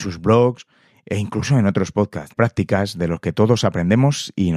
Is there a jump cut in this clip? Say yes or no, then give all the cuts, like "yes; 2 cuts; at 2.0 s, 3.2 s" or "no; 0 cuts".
yes; 1 cut; at 2.3 s